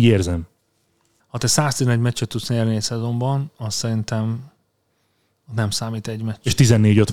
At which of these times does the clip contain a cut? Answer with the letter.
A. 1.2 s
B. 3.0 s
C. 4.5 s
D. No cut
A